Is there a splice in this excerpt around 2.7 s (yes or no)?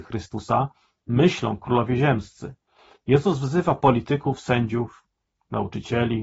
no